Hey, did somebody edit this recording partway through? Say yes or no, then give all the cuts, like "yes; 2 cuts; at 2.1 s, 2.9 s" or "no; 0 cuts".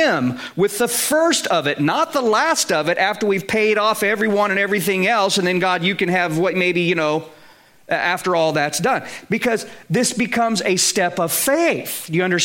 no; 0 cuts